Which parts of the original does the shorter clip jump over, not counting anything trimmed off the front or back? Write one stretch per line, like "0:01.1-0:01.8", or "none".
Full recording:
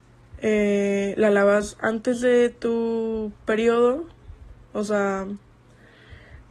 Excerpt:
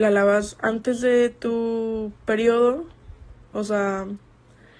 none